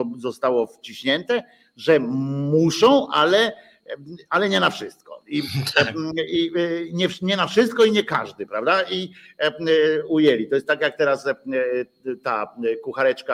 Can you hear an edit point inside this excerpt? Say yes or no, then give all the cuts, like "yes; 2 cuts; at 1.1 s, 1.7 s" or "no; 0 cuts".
no; 0 cuts